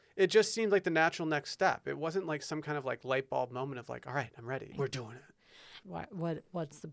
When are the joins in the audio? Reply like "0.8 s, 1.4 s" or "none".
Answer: 4.7 s, 5.8 s